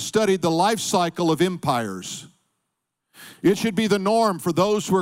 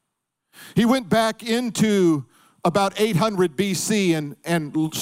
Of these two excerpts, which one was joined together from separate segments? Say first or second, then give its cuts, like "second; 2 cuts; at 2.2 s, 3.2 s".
first; 1 cut; at 3.3 s